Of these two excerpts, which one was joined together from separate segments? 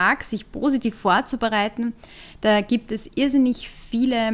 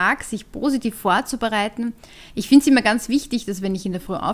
second; 1 cut; at 2.3 s

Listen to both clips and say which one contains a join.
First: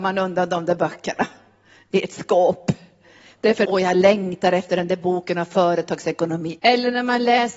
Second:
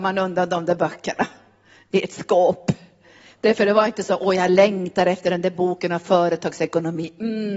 first; 2 cuts; at 3.6 s, 6.6 s

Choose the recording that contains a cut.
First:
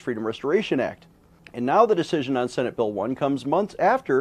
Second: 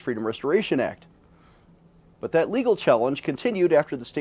first; 1 cut; at 1.4 s

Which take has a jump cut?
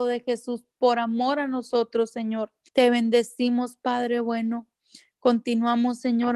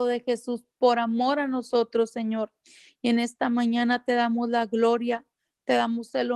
first; 1 cut; at 2.7 s

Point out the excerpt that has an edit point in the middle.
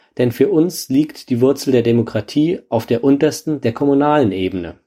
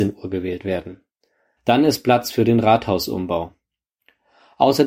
second; 1 cut; at 1.6 s

